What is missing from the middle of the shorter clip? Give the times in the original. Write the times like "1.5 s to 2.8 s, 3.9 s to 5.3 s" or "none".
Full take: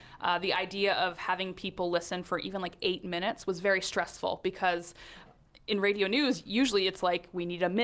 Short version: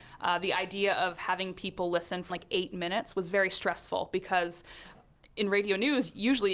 2.3 s to 2.6 s